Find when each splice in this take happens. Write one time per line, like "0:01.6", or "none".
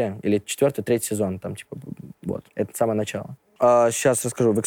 0:02.5